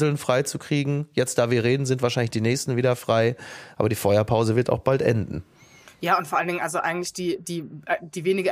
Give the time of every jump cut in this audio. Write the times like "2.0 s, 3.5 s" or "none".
none